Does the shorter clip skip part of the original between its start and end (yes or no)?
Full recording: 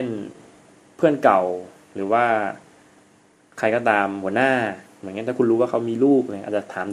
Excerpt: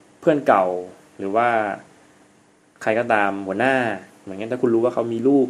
no